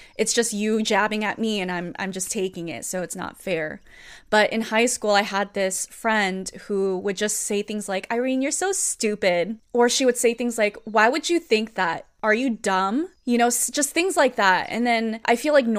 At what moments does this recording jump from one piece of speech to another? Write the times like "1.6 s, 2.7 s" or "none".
none